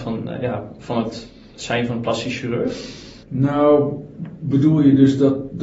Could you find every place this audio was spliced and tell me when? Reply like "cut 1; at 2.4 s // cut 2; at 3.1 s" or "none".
cut 1; at 3.2 s